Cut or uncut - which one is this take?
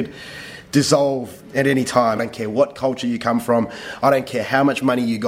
cut